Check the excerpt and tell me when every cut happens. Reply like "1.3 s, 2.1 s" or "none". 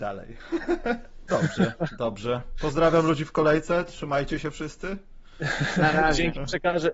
1.3 s